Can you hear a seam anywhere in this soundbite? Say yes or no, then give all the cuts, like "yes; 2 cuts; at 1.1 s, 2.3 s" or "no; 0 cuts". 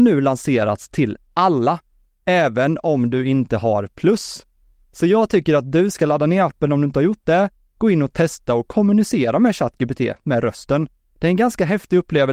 no; 0 cuts